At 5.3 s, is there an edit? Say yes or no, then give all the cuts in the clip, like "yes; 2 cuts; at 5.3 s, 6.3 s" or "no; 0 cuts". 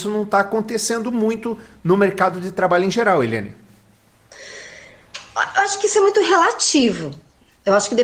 no; 0 cuts